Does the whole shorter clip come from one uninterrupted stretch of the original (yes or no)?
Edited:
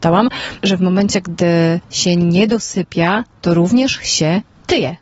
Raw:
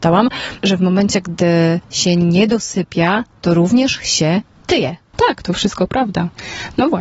yes